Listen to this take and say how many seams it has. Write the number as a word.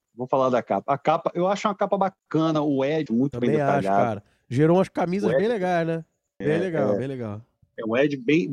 two